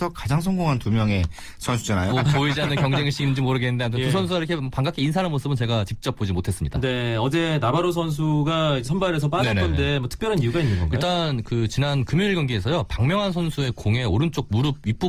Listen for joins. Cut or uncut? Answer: cut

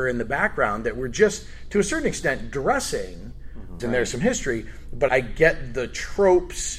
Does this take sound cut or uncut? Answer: cut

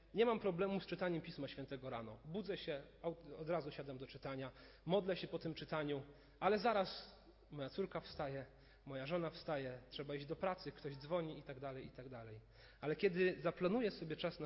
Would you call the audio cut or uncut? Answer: uncut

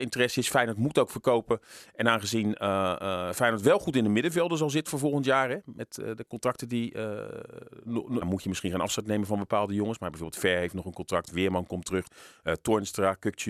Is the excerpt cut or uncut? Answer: cut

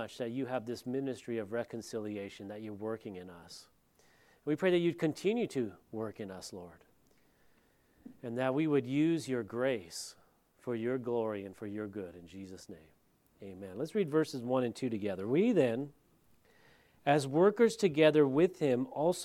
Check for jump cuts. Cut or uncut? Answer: uncut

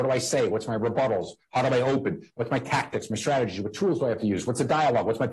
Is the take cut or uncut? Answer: uncut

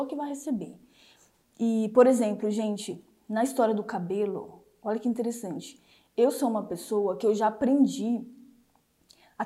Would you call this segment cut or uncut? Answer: uncut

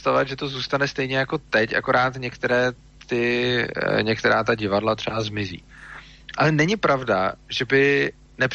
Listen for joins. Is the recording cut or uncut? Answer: cut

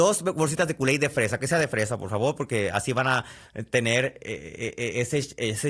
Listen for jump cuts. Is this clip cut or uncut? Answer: uncut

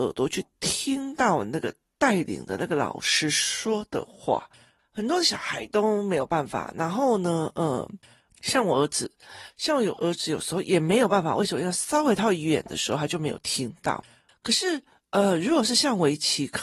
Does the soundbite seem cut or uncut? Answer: uncut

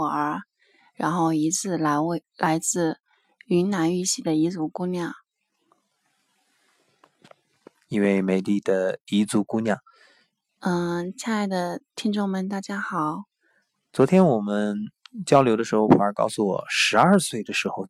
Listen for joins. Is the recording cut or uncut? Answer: cut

